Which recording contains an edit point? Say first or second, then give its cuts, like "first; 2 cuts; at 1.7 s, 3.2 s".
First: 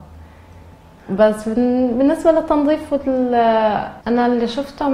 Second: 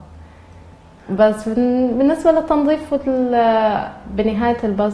first; 1 cut; at 4.0 s